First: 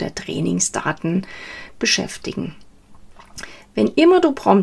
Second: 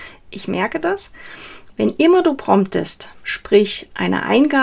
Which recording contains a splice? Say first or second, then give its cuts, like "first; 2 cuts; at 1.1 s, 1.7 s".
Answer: second; 1 cut; at 1.7 s